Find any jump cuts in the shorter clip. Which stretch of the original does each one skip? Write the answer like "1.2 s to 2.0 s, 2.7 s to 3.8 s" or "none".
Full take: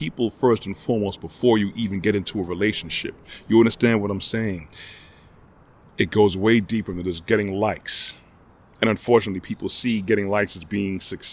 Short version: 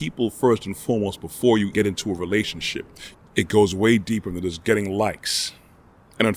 1.7 s to 2.0 s, 3.4 s to 5.8 s